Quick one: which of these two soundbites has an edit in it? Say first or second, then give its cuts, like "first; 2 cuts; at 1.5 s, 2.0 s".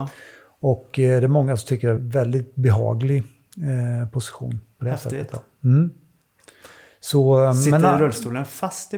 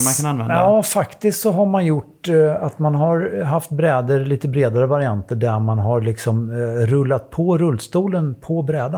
first; 1 cut; at 2.0 s